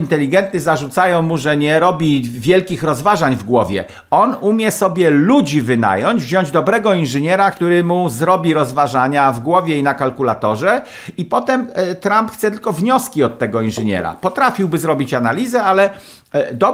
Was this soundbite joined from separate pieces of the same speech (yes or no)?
no